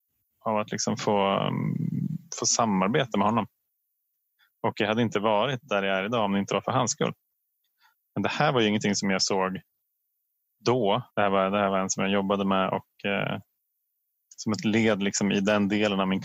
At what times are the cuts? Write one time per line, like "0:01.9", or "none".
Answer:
0:11.1